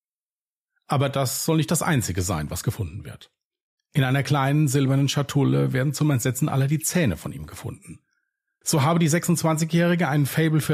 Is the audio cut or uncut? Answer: cut